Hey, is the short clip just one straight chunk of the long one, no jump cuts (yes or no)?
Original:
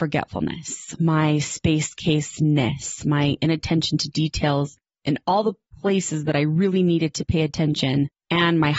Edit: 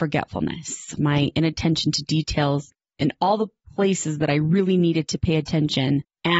no